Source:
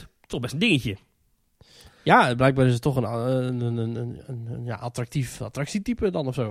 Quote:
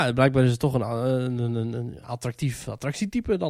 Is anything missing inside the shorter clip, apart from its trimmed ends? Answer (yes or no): yes